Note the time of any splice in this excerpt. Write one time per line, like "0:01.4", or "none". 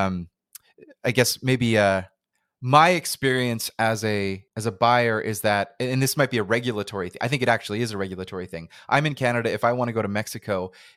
0:04.5